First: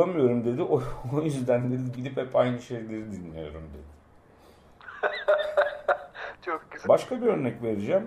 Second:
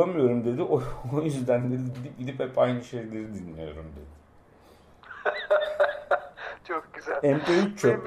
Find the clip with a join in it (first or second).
first